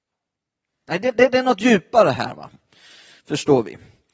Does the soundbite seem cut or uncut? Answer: uncut